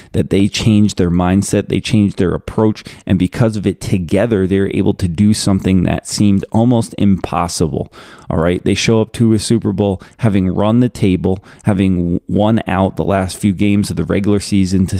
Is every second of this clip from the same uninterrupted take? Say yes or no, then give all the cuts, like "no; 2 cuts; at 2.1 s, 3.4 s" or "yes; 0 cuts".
yes; 0 cuts